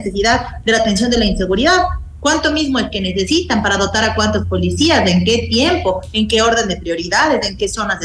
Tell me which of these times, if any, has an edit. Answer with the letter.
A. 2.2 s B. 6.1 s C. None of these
C